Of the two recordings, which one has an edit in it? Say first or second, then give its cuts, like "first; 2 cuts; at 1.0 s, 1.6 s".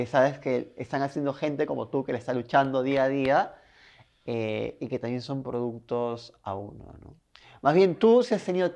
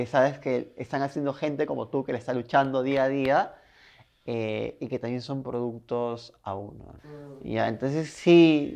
second; 1 cut; at 7.0 s